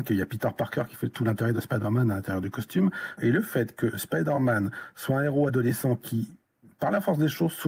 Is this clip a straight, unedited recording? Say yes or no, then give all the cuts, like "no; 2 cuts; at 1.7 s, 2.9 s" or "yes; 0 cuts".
no; 1 cut; at 3.2 s